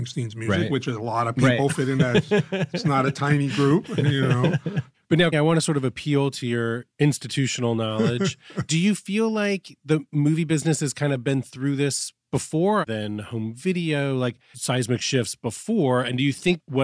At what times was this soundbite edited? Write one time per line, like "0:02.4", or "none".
0:05.3
0:12.9
0:14.5